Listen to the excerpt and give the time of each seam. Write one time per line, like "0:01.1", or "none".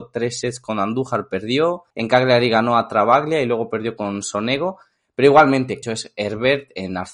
0:01.9
0:05.8

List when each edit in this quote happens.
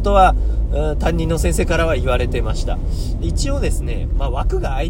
none

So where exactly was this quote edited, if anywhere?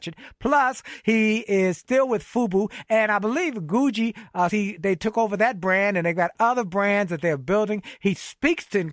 0:04.5

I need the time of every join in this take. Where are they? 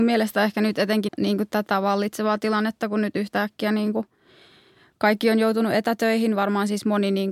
0:01.1

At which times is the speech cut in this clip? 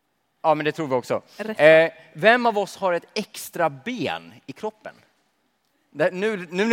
none

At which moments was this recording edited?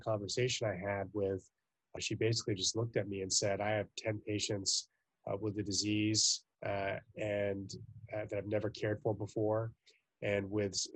0:02.0
0:06.5

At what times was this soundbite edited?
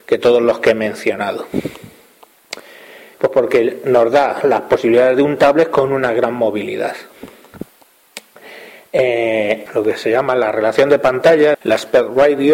0:03.1
0:09.7
0:11.5

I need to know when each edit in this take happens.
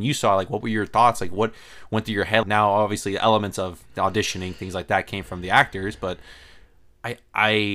0:02.4

